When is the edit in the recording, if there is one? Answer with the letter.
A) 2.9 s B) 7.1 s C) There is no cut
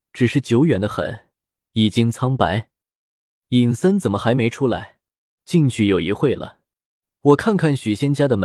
C